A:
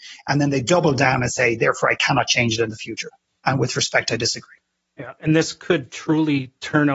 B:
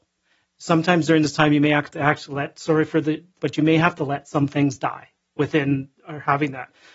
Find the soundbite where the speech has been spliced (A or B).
B